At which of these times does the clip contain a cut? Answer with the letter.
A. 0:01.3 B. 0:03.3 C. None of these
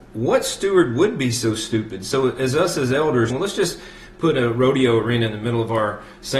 B